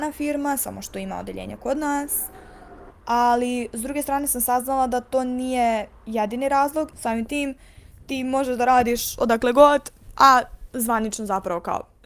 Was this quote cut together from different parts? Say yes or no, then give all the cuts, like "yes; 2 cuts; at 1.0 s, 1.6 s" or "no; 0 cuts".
yes; 2 cuts; at 2.9 s, 6.9 s